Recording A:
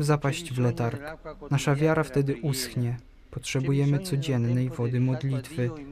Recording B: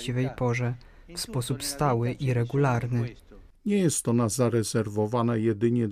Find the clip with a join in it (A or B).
B